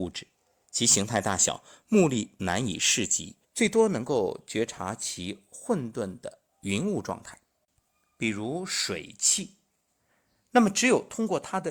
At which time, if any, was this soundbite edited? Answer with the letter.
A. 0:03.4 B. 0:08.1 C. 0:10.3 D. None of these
A